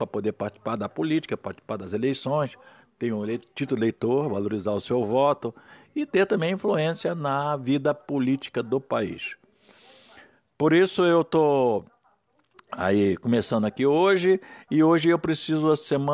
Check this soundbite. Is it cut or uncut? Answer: uncut